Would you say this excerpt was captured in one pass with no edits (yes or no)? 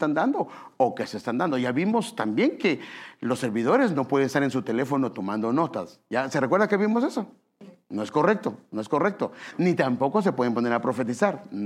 yes